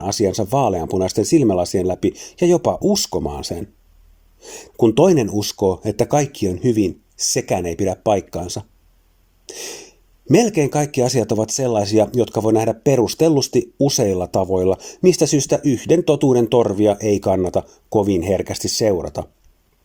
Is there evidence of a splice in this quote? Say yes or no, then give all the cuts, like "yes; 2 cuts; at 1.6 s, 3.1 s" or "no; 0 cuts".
yes; 1 cut; at 4.7 s